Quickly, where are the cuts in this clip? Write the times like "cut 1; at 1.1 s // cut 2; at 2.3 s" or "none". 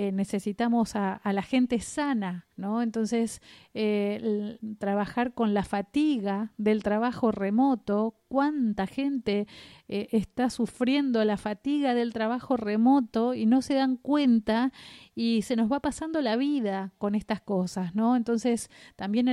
cut 1; at 2.5 s